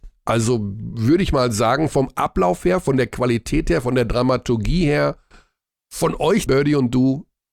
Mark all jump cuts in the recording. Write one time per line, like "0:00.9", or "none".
0:06.5